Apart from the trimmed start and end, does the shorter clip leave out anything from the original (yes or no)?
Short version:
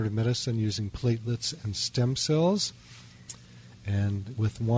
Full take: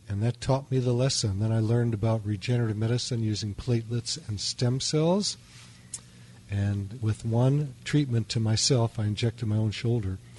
no